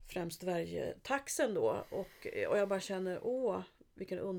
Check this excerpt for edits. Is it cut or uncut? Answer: uncut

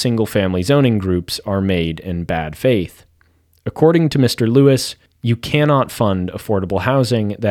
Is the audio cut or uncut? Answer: cut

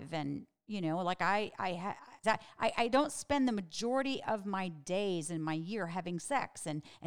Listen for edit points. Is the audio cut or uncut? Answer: cut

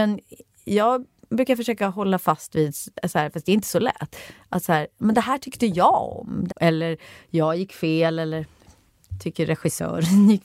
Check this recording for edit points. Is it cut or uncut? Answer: cut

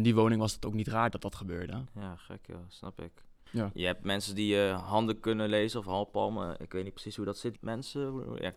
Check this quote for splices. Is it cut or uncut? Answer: cut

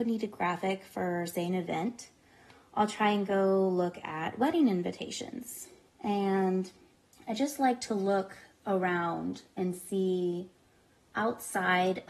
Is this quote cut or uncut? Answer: cut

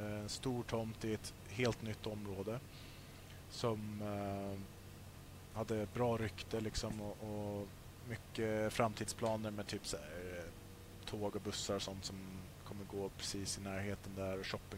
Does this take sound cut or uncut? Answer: uncut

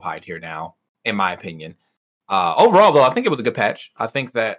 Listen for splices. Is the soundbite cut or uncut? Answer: uncut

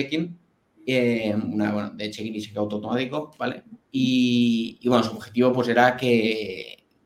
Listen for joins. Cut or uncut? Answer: uncut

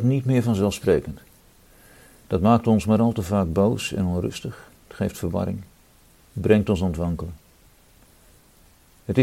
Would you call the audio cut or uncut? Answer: uncut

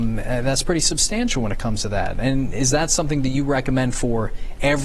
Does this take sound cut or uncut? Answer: uncut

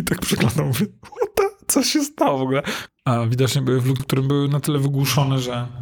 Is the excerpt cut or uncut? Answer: cut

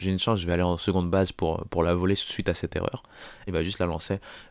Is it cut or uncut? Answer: cut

